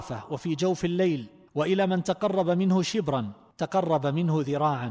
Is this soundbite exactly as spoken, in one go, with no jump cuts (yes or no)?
yes